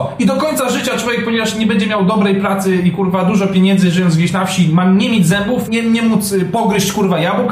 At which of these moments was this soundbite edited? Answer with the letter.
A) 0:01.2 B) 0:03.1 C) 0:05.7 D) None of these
C